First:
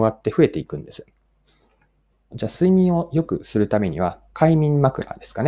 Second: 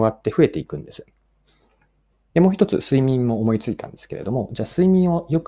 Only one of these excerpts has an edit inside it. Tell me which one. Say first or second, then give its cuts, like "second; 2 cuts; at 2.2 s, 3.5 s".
first; 1 cut; at 2.3 s